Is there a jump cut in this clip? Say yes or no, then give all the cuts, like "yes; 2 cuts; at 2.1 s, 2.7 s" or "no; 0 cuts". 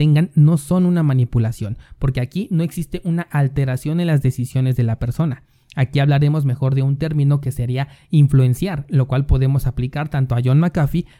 no; 0 cuts